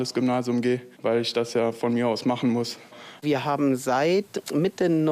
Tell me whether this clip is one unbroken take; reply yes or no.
no